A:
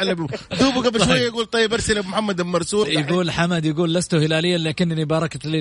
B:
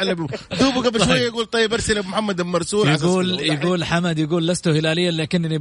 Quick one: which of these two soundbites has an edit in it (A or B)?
A